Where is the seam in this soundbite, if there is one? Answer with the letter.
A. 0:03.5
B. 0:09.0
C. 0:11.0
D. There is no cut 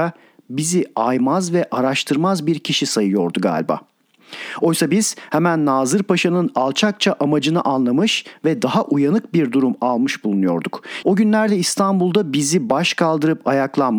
C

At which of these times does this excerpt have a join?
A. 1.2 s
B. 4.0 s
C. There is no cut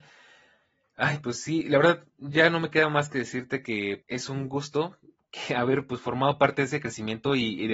B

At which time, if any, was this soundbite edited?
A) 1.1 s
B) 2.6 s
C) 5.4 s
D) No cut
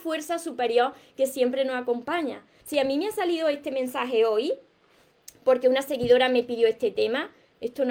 B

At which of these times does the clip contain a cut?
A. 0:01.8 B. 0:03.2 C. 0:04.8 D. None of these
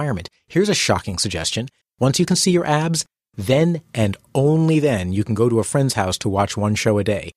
A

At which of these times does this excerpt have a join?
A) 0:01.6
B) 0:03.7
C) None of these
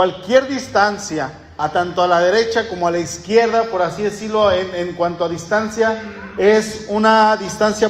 A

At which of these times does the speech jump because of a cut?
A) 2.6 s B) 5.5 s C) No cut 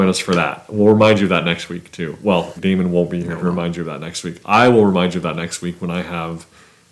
A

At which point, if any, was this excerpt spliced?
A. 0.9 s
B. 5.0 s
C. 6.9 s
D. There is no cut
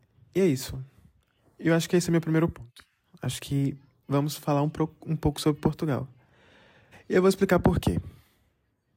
C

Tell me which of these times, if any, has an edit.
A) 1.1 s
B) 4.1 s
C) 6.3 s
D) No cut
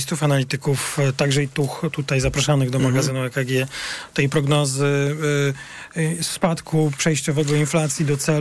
D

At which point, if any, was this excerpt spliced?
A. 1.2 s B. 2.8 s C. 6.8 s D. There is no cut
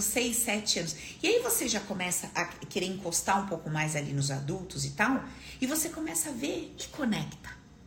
C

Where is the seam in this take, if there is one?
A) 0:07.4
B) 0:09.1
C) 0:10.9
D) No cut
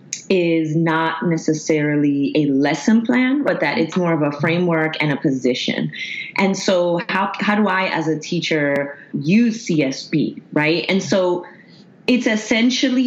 B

